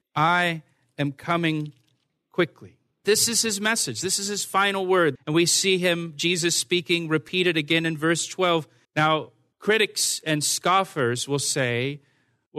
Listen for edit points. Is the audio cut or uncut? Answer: cut